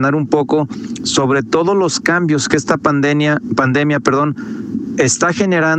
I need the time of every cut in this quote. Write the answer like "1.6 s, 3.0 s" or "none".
none